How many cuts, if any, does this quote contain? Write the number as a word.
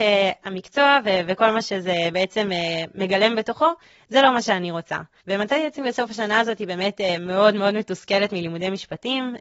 one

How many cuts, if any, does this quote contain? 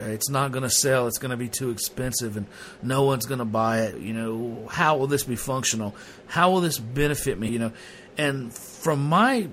two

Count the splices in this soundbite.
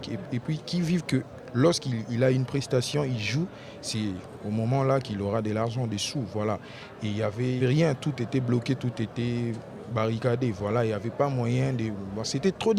one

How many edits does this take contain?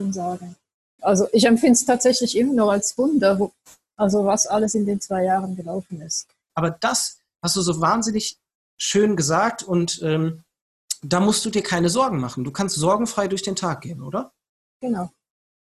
two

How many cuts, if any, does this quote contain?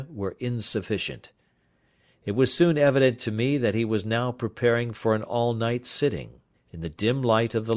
one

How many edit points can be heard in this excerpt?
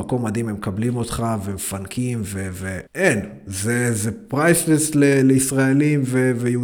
one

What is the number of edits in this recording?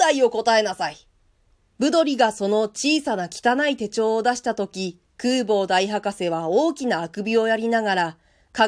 two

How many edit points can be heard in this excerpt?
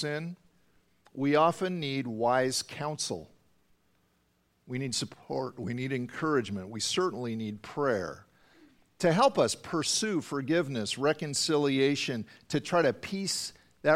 zero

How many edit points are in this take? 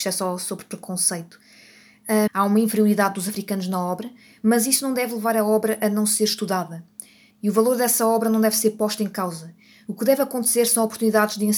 two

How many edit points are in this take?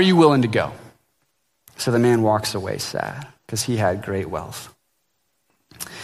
one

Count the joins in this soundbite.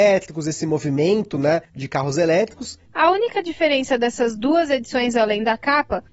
one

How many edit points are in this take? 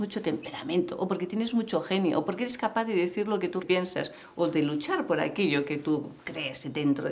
one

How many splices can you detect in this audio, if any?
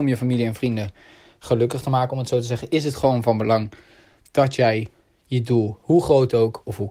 zero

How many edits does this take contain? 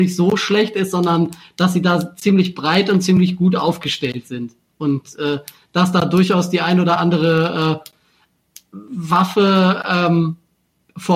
zero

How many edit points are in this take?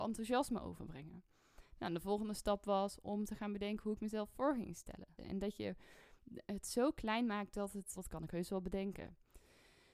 two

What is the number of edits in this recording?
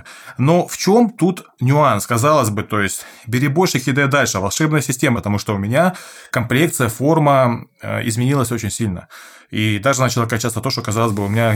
one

